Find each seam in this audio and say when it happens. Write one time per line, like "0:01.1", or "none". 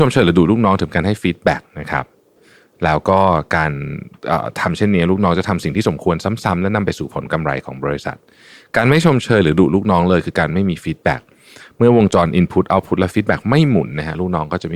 none